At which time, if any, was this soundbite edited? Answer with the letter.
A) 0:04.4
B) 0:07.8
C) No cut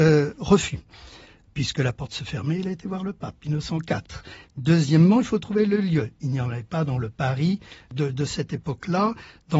A